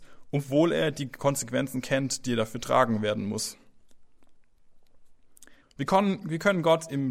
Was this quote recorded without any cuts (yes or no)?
no